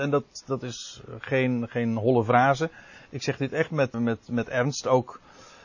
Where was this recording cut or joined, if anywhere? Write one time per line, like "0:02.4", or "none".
0:03.9